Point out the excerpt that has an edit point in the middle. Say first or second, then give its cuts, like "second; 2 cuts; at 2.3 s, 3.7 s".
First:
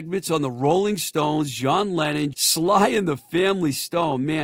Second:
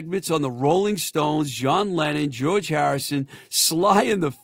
first; 1 cut; at 2.3 s